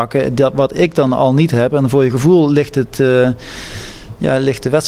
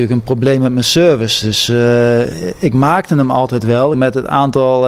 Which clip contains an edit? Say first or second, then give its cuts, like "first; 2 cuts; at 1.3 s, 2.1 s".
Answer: second; 1 cut; at 3.9 s